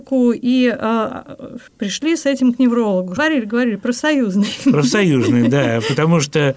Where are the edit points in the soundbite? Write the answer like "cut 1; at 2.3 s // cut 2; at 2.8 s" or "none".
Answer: cut 1; at 1.7 s // cut 2; at 3.2 s